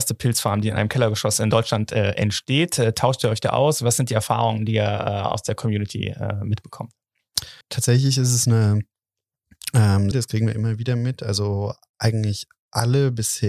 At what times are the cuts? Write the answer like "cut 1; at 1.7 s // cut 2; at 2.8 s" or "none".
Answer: cut 1; at 7.6 s // cut 2; at 10.1 s

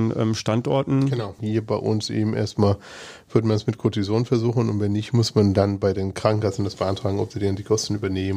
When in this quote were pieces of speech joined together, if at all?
cut 1; at 1.4 s

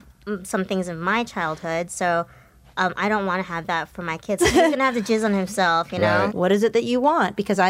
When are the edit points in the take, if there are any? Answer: cut 1; at 4.4 s // cut 2; at 6.3 s

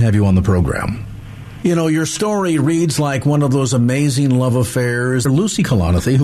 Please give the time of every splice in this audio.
cut 1; at 1.6 s // cut 2; at 5.3 s

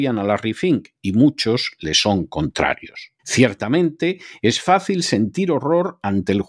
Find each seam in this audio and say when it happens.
cut 1; at 3.2 s

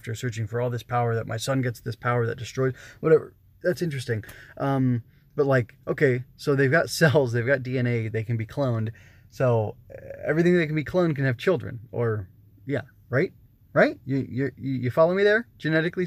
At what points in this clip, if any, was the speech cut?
none

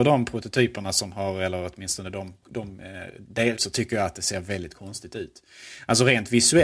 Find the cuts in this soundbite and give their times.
cut 1; at 2.4 s // cut 2; at 3.6 s

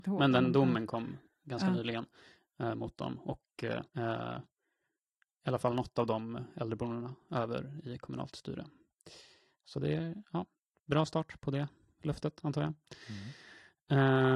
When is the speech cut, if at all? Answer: cut 1; at 3.9 s

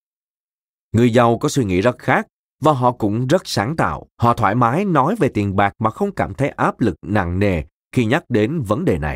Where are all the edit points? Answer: cut 1; at 4.1 s

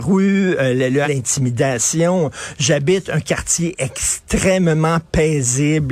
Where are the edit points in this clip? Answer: cut 1; at 1.0 s

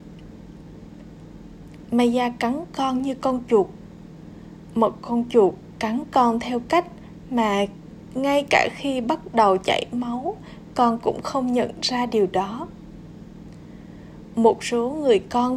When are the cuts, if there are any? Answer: cut 1; at 1.9 s

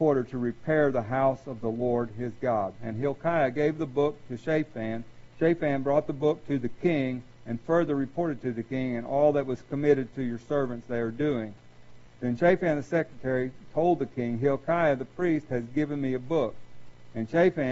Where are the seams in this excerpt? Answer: cut 1; at 2.8 s // cut 2; at 12.1 s

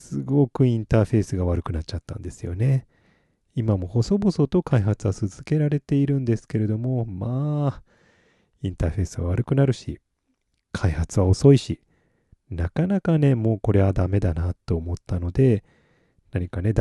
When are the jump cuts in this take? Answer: none

